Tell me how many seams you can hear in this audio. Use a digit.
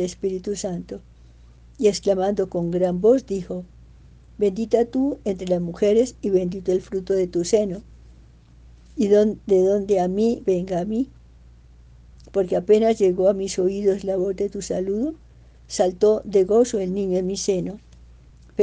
1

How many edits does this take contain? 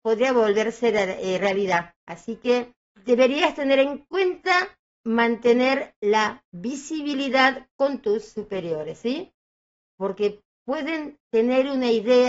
2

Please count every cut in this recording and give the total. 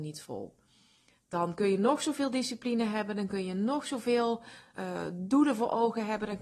1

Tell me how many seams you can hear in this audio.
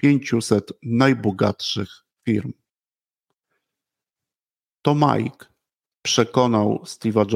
0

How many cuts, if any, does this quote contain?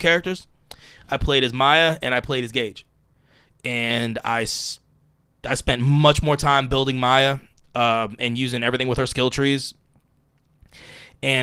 0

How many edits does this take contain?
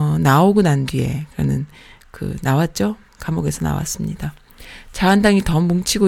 1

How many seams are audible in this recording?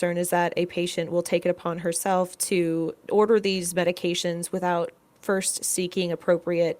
1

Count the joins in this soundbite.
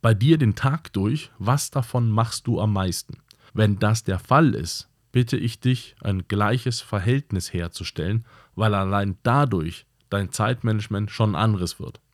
1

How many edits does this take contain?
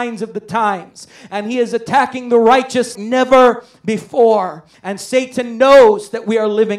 2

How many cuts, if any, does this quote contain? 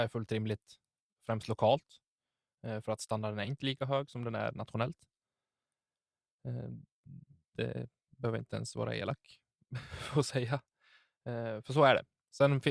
0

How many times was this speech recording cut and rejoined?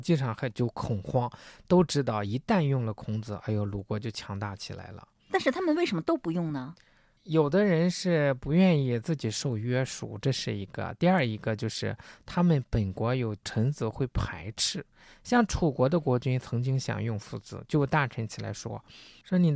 0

